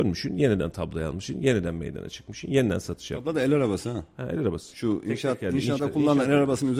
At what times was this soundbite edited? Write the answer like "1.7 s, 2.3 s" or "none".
5.8 s